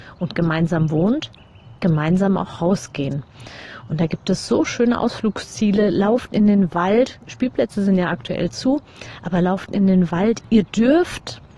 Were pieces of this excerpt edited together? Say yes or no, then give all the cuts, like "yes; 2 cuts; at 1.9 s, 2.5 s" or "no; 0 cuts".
yes; 1 cut; at 10.4 s